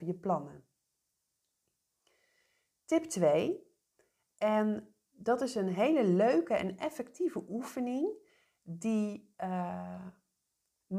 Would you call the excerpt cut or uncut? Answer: cut